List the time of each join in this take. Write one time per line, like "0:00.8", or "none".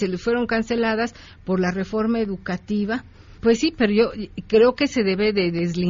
0:03.4